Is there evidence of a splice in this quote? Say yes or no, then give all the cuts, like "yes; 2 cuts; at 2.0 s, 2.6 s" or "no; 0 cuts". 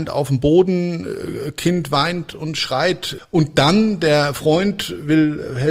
yes; 1 cut; at 3.2 s